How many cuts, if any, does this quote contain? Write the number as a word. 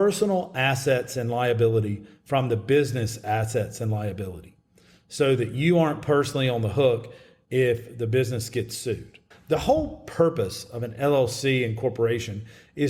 one